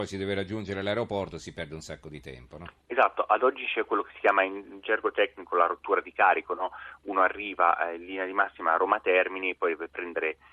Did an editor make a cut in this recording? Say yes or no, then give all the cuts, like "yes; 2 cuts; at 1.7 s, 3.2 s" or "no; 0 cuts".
no; 0 cuts